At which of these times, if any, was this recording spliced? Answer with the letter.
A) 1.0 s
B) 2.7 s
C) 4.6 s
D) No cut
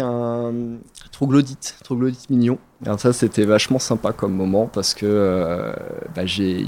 D